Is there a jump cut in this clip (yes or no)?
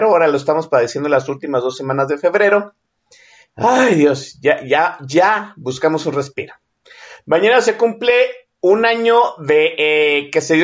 no